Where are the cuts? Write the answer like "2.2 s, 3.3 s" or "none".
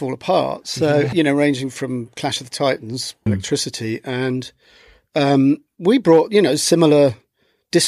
1.1 s, 3.3 s